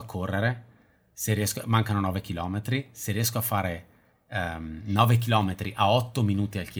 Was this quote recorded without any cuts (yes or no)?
yes